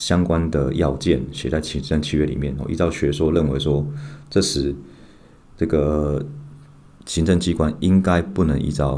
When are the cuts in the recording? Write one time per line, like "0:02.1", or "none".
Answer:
none